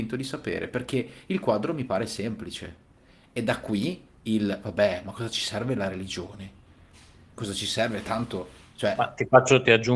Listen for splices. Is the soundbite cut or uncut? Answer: uncut